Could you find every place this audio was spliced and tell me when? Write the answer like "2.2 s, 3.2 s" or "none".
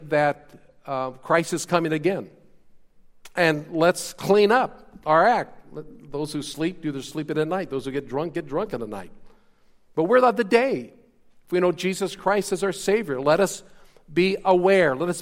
none